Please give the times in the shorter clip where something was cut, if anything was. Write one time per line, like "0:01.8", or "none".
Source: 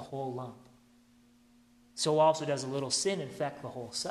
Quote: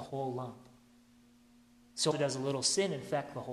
0:02.1